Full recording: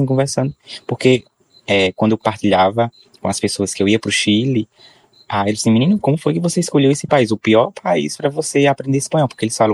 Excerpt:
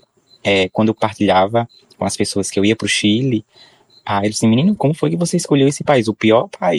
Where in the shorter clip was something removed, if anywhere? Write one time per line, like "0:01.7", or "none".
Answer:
none